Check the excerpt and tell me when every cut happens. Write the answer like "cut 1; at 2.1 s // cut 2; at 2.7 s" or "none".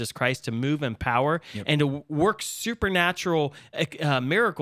none